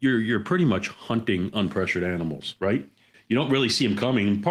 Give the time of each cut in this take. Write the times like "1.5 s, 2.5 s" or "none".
3.1 s